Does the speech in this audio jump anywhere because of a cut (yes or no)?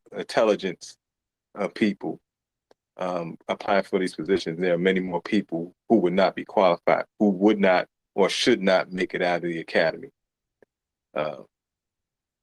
no